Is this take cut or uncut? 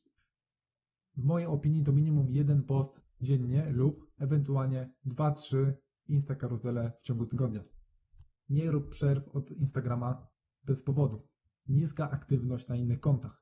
cut